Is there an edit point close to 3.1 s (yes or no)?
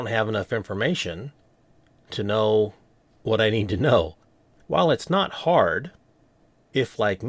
no